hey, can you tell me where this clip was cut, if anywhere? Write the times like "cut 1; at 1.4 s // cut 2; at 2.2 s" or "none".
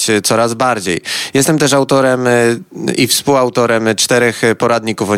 none